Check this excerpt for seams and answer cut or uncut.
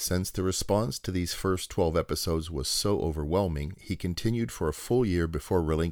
uncut